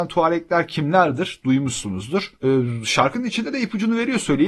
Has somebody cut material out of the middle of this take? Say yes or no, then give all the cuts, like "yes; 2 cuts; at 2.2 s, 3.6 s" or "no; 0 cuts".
no; 0 cuts